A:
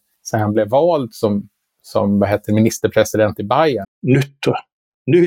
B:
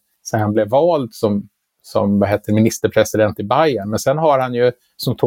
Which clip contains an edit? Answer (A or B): A